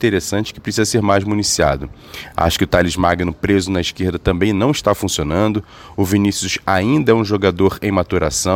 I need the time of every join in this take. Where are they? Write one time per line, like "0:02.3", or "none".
none